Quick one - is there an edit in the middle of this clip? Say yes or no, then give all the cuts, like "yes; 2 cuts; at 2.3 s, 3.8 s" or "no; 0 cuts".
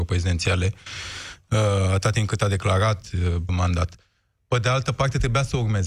yes; 1 cut; at 3.5 s